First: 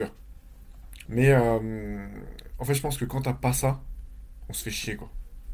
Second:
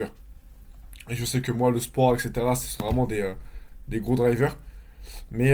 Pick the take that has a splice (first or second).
first